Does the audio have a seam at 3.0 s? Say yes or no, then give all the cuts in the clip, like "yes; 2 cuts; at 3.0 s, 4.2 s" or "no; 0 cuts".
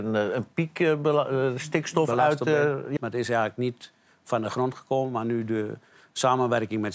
yes; 1 cut; at 3.0 s